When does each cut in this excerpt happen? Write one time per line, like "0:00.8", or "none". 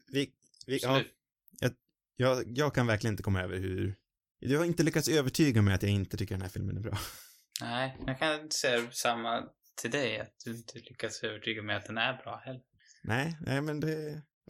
none